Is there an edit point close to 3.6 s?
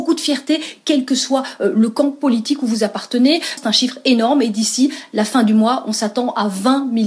yes; 1 cut; at 3.6 s

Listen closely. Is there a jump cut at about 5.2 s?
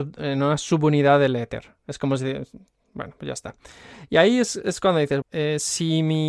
yes; 1 cut; at 5.2 s

